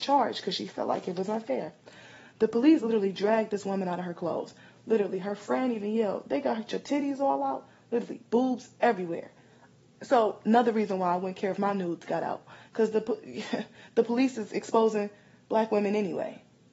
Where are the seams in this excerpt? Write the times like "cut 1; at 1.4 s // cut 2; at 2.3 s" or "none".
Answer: none

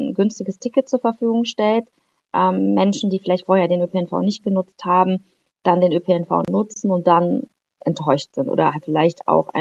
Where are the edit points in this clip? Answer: none

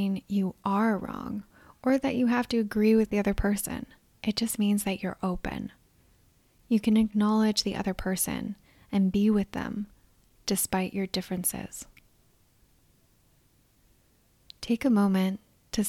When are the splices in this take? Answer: cut 1; at 4.2 s

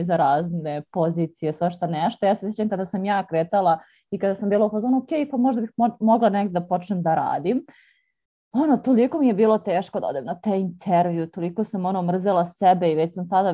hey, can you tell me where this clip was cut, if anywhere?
none

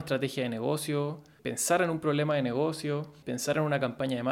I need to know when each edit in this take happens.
cut 1; at 1.4 s // cut 2; at 3.2 s

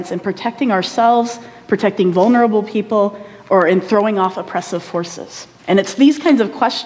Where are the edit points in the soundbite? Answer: cut 1; at 5.6 s

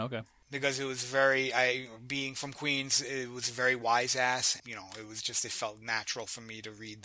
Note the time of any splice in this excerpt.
cut 1; at 4.6 s

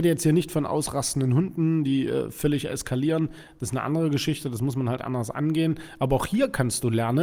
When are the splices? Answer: none

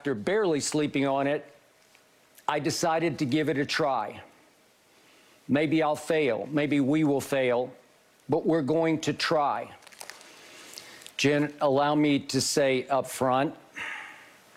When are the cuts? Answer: cut 1; at 11.1 s

